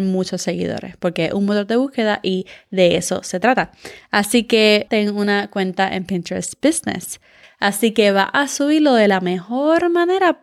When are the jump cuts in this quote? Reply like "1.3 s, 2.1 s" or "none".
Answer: 4.9 s, 7.4 s